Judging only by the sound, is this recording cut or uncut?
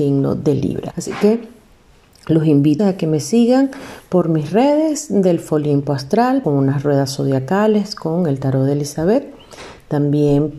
cut